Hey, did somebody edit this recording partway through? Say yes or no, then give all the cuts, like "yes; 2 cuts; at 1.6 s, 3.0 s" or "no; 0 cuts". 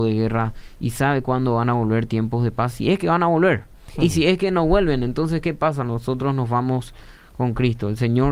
no; 0 cuts